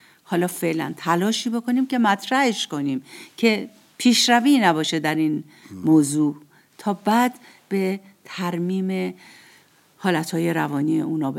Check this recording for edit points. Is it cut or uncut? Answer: uncut